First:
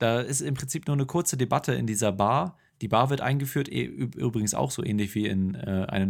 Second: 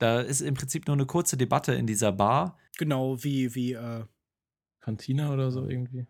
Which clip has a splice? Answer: second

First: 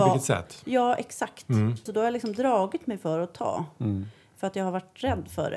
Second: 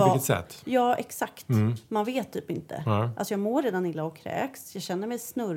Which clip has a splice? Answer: first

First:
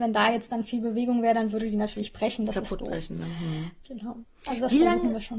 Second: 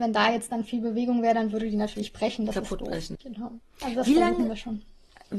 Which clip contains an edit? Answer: second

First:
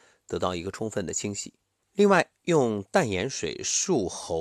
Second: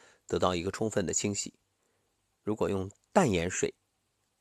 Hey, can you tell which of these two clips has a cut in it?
first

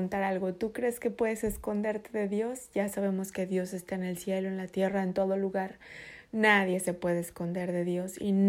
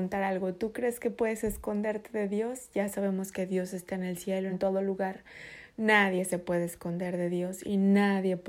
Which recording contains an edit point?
second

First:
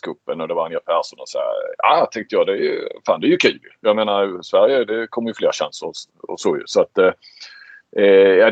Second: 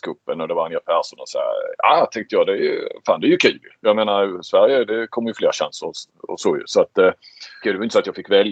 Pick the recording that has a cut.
second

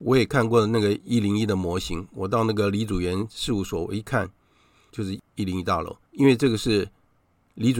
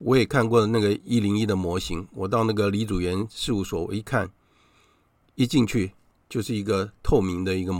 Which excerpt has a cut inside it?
first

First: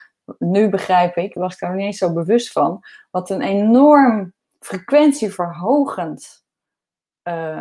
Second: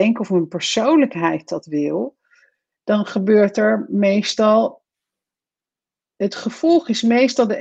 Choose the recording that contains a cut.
first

